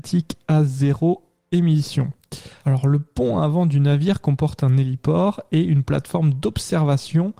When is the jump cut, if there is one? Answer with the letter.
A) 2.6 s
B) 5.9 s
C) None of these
A